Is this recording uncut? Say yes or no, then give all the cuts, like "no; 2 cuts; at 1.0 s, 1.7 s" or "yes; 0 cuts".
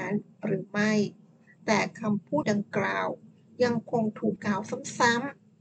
no; 2 cuts; at 2.4 s, 4.4 s